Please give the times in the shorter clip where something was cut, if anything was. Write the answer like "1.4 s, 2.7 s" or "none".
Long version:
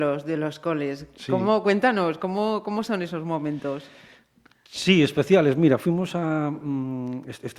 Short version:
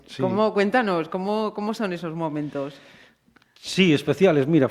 none